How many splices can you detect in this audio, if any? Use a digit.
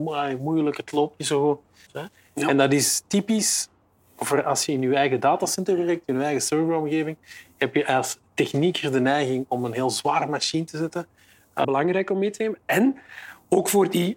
2